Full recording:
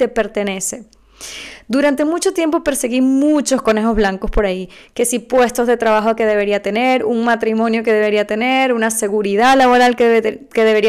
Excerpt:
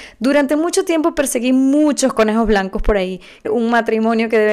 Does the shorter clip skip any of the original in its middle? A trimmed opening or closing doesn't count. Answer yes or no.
yes